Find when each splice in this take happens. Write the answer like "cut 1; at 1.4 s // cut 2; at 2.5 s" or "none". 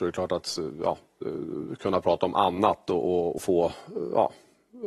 cut 1; at 3.4 s